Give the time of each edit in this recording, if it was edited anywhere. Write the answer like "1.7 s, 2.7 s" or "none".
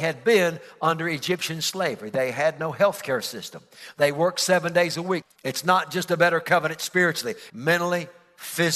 5.2 s, 7.5 s